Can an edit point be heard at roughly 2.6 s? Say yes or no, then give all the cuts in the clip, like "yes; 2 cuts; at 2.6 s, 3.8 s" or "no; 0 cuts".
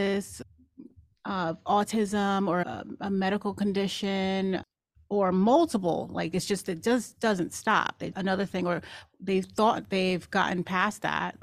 no; 1 cut; at 8.1 s